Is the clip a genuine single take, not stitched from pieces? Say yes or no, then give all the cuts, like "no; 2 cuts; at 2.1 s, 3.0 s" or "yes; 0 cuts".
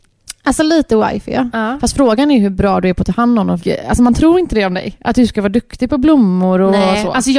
no; 1 cut; at 3.6 s